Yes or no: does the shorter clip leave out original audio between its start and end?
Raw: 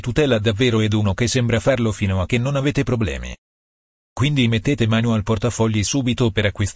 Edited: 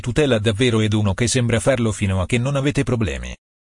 no